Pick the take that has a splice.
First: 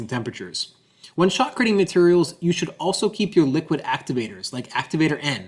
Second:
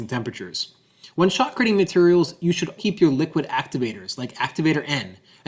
second; 1 cut; at 2.8 s

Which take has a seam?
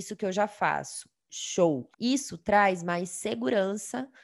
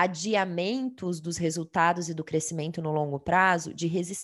first; 1 cut; at 1.9 s

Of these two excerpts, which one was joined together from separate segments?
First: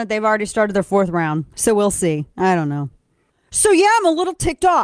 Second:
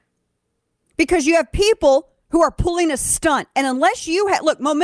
first; 2 cuts; at 1.5 s, 3.3 s

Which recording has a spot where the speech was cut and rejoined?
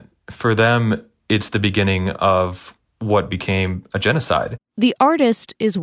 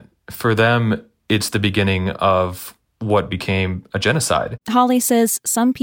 second; 1 cut; at 4.6 s

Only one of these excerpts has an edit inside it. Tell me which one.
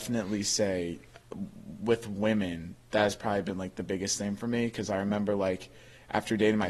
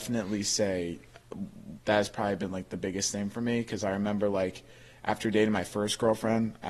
second; 1 cut; at 1.8 s

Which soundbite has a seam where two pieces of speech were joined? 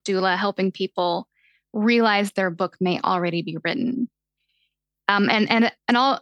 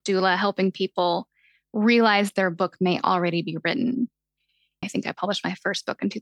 second; 1 cut; at 4.8 s

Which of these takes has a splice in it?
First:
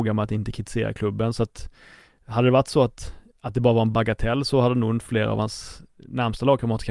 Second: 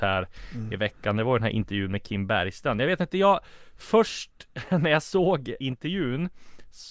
second; 1 cut; at 5.6 s

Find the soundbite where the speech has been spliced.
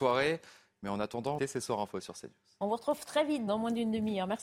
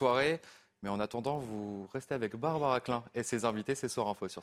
first; 2 cuts; at 1.4 s, 3.5 s

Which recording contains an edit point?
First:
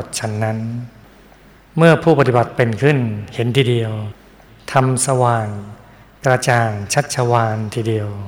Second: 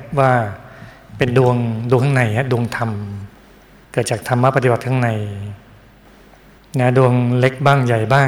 first; 1 cut; at 5.1 s

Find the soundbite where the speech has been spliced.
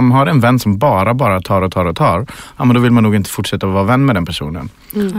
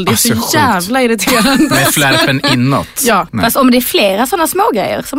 second; 1 cut; at 3.3 s

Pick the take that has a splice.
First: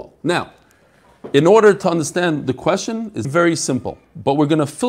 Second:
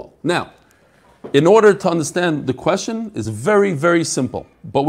first; 1 cut; at 3.2 s

